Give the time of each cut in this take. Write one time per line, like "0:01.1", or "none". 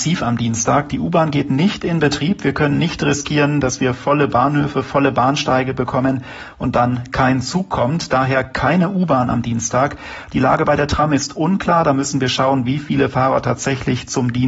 none